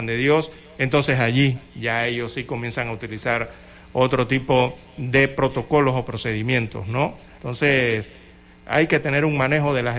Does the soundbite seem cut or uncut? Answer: cut